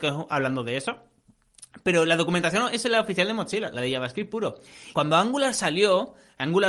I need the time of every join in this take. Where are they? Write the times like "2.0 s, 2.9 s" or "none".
4.9 s